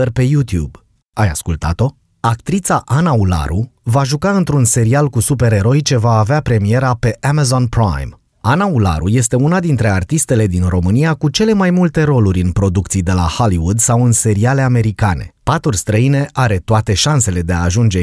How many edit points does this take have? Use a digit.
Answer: 2